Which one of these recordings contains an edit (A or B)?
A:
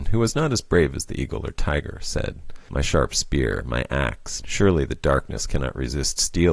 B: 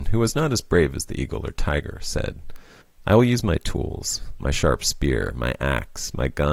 A